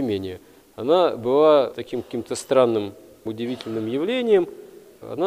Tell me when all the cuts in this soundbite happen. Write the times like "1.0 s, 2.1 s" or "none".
1.7 s, 3.3 s